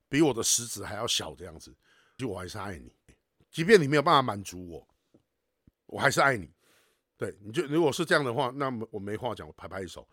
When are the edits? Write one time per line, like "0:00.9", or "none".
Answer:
0:02.2
0:05.7